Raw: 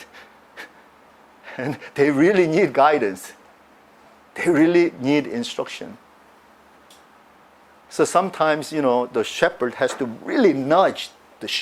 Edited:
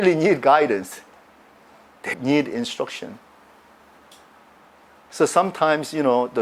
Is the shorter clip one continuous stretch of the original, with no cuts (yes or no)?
no